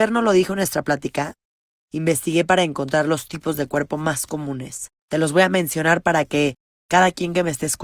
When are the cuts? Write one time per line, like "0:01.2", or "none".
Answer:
0:05.0